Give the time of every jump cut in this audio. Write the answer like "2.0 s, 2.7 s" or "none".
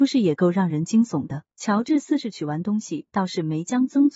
1.5 s